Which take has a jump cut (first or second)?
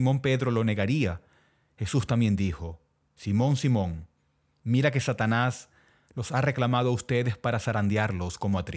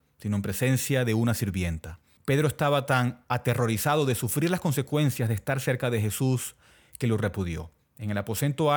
second